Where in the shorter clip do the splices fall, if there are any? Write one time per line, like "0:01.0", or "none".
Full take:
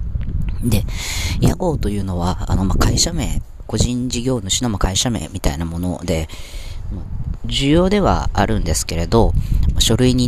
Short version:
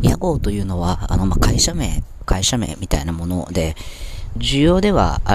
0:02.3
0:04.3